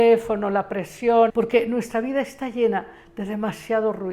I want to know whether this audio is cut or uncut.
cut